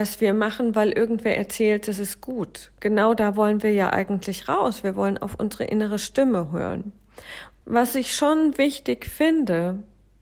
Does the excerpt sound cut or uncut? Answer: cut